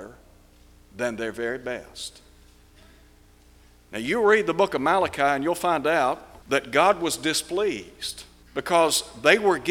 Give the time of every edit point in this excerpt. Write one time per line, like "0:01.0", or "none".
0:06.4
0:08.4